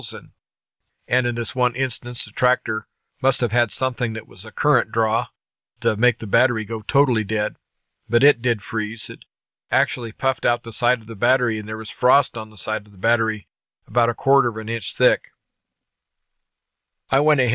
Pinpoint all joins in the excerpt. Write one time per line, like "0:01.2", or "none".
none